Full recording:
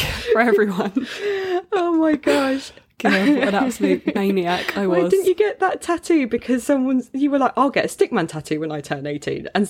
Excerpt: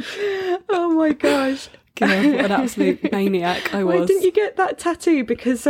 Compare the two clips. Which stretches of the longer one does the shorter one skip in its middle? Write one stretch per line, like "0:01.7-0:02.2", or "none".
none